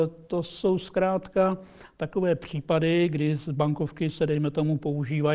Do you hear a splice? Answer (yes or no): no